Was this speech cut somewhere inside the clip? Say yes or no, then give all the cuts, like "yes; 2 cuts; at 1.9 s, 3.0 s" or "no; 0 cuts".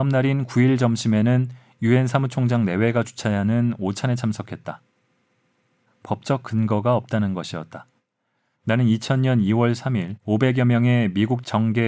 yes; 3 cuts; at 5.9 s, 8.5 s, 10.2 s